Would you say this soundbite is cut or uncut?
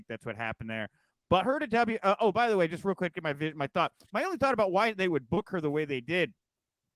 uncut